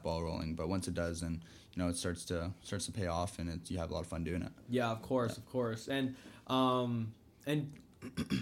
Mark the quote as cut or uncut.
uncut